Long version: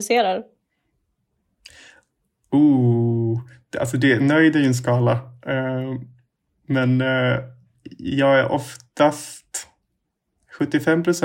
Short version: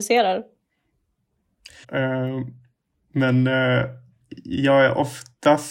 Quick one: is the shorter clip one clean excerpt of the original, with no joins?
no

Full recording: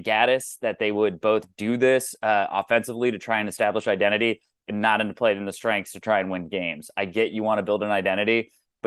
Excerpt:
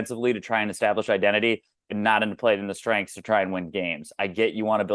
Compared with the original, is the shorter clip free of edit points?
yes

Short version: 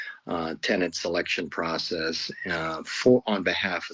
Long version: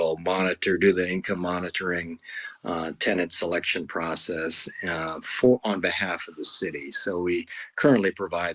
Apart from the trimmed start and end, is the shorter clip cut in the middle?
no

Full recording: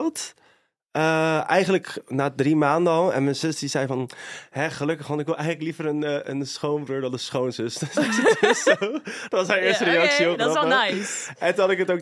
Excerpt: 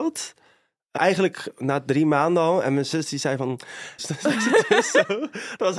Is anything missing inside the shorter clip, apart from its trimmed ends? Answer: yes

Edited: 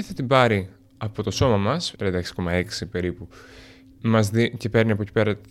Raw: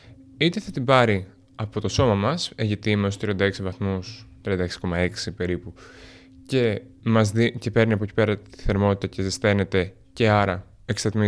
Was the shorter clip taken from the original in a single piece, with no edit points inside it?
no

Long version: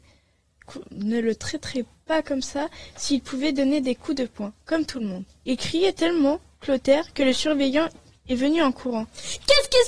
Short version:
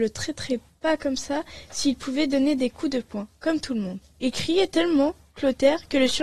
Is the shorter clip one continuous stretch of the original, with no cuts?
yes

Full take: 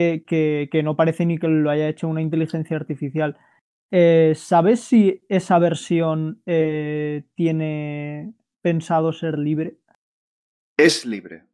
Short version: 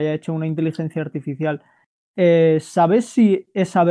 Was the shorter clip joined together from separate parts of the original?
no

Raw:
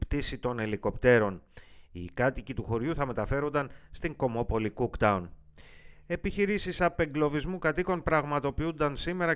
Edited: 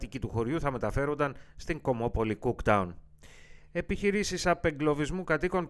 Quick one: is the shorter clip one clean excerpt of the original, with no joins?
yes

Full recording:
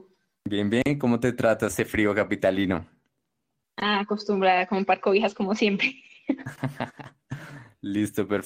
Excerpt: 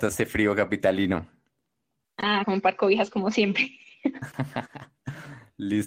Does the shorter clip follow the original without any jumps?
no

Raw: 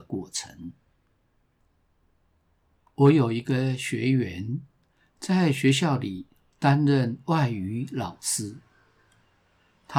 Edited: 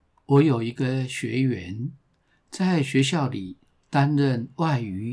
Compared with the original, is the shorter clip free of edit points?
yes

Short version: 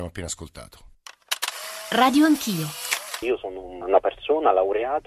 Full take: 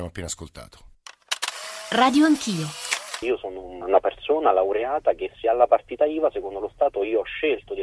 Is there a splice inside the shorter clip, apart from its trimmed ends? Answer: no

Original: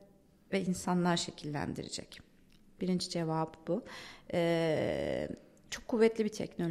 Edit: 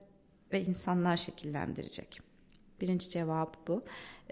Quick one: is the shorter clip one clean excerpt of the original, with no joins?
yes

